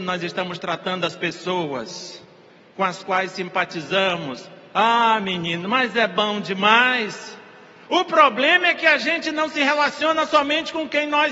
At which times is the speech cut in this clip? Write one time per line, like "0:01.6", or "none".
none